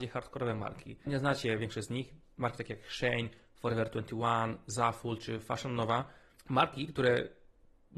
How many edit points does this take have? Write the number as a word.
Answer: one